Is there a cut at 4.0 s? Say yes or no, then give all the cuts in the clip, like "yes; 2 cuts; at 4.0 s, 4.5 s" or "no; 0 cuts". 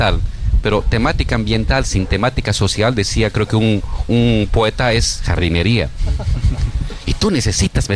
yes; 1 cut; at 4.0 s